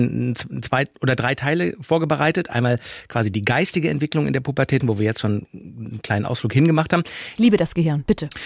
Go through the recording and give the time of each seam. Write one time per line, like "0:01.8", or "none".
0:04.8
0:07.4